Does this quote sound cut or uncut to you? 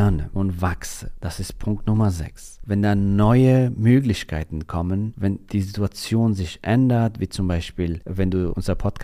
uncut